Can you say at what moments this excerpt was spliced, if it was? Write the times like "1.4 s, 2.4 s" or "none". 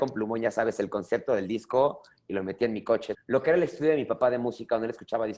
3.1 s

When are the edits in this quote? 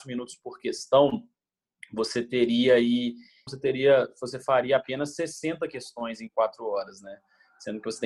3.5 s

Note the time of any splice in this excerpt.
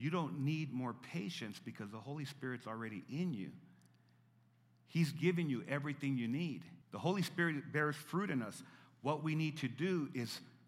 6.8 s

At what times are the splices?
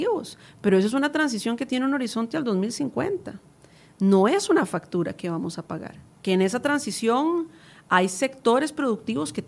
none

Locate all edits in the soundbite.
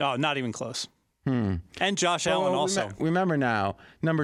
none

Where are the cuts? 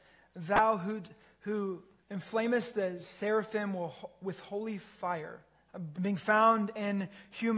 2.0 s, 5.9 s

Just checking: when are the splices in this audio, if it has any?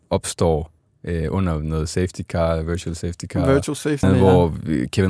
4.0 s

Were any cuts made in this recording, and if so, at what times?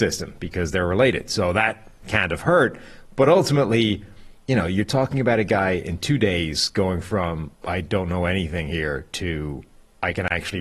4.4 s, 7.5 s

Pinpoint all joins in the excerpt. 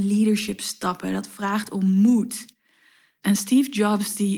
3.2 s

